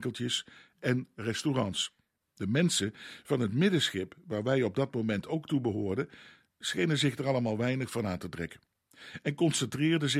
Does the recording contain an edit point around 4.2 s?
no; 1 cut; at 2.2 s

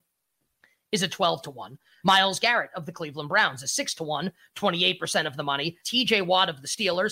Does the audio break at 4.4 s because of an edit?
no; 2 cuts; at 2.0 s, 5.8 s

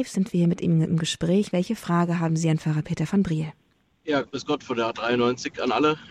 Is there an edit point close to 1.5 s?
yes; 1 cut; at 1.5 s

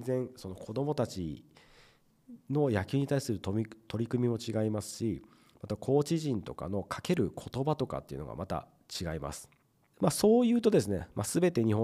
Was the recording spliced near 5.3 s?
no; 1 cut; at 9.9 s

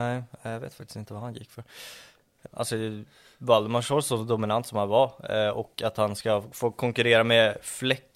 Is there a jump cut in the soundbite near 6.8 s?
no; 1 cut; at 2.5 s

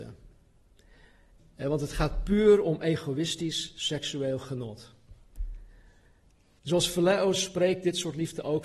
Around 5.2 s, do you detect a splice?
no; 2 cuts; at 1.4 s, 6.6 s

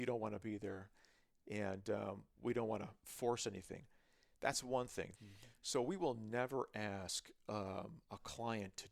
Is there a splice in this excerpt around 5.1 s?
yes; 1 cut; at 5.1 s

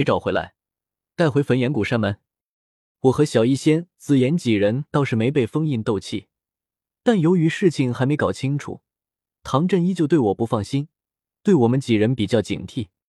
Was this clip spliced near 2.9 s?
yes; 1 cut; at 2.9 s

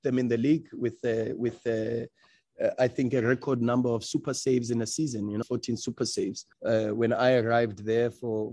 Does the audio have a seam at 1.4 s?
no; 2 cuts; at 5.4 s, 6.5 s

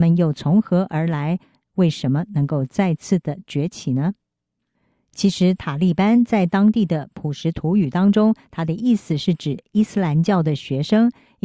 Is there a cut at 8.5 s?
no; 0 cuts

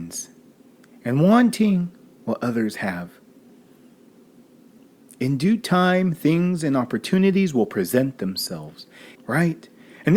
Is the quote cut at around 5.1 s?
no; 1 cut; at 9.1 s

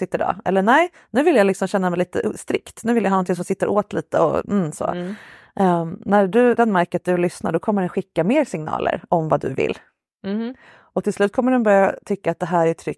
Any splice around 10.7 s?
no; 1 cut; at 6.6 s

